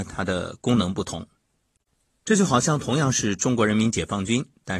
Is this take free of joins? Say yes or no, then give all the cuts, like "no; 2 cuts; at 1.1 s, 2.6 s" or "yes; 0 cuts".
yes; 0 cuts